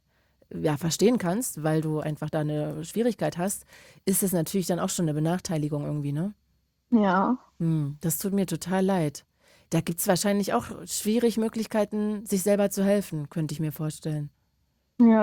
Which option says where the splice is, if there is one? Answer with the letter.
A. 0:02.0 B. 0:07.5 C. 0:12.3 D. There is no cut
D